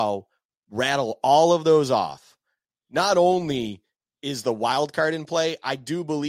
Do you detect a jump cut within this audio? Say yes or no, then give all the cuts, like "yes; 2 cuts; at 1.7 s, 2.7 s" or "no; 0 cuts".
no; 0 cuts